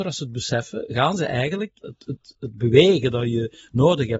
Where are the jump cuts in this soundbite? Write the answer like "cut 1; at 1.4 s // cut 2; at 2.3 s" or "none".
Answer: cut 1; at 1.8 s